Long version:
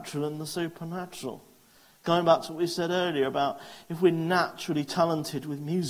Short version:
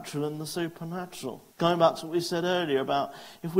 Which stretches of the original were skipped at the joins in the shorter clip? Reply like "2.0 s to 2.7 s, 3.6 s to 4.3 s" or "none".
1.5 s to 2.0 s

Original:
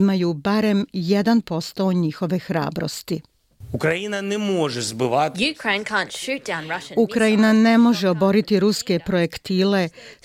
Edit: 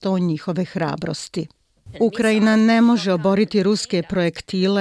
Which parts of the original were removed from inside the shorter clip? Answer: 3.7 s to 6.9 s

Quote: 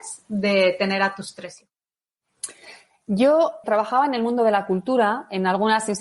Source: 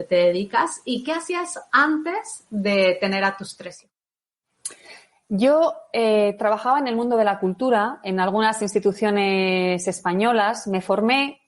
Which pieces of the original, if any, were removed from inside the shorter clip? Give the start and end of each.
5.9 s to 6.4 s

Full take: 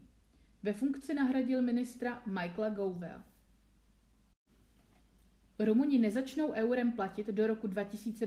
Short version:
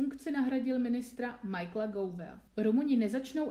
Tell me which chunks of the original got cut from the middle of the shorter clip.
3.3 s to 5.5 s

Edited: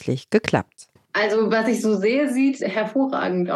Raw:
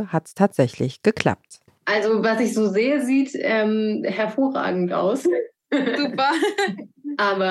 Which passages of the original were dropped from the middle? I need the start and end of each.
3.3 s to 4.0 s

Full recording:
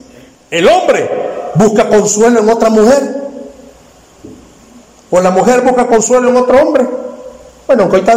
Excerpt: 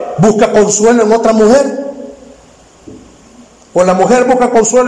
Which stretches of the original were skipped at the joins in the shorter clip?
none

